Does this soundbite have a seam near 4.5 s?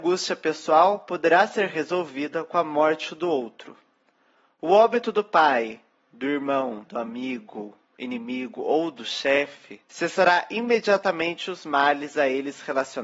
no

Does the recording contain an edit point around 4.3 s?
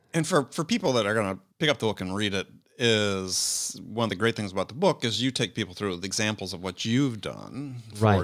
no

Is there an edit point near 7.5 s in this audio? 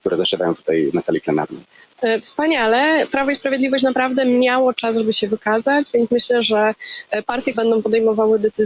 yes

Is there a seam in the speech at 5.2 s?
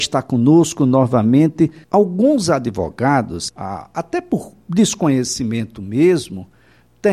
no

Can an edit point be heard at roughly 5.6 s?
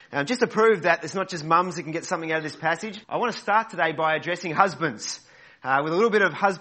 no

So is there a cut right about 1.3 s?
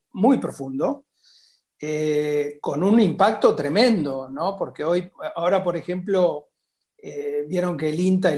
no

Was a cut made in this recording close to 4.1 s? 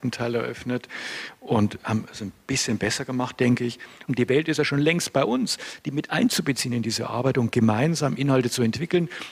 yes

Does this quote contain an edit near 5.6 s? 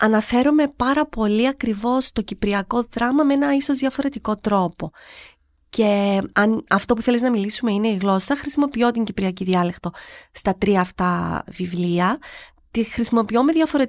no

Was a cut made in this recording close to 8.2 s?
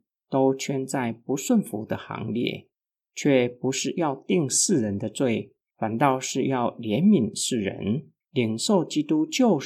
yes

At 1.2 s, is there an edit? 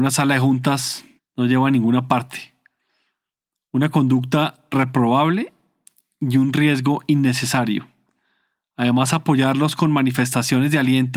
yes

